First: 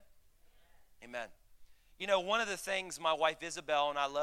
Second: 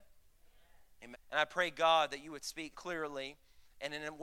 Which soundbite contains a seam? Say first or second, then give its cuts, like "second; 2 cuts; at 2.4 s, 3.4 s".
second; 2 cuts; at 1.1 s, 2.7 s